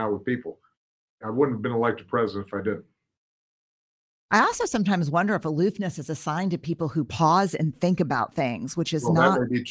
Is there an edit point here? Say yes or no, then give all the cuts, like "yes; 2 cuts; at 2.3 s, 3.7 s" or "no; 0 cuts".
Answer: no; 0 cuts